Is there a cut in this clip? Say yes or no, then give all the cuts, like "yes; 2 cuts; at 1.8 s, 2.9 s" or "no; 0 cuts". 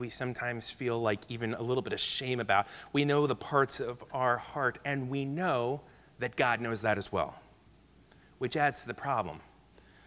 no; 0 cuts